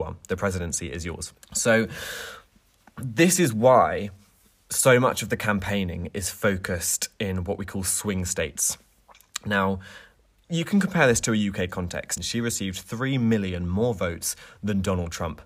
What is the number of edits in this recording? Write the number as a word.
two